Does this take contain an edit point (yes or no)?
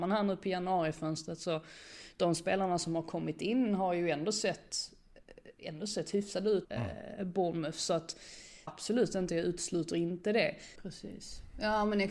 yes